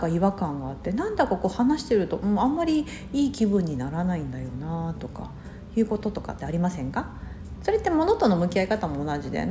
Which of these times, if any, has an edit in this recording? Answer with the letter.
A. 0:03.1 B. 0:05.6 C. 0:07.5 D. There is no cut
C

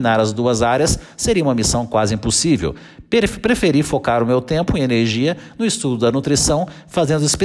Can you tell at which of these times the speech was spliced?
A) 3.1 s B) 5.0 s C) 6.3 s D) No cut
D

